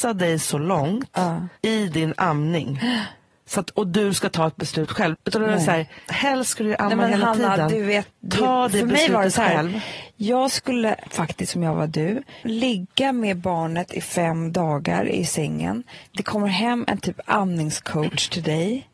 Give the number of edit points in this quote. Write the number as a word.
two